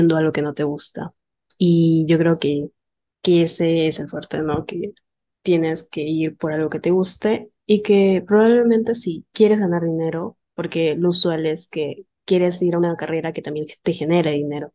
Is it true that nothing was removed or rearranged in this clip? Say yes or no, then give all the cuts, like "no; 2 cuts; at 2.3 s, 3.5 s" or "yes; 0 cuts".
yes; 0 cuts